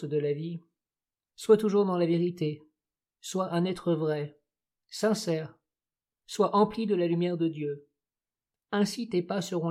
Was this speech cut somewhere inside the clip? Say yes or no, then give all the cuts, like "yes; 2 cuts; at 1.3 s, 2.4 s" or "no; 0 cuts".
yes; 2 cuts; at 1.3 s, 6.2 s